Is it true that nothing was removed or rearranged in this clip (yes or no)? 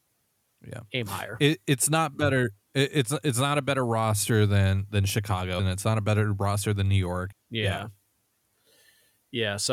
no